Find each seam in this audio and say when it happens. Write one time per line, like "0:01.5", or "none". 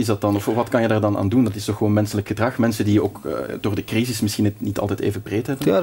none